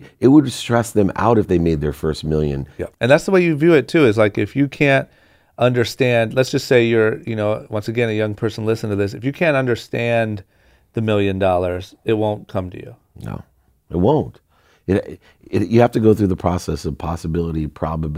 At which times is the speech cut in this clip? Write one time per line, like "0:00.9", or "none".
0:02.9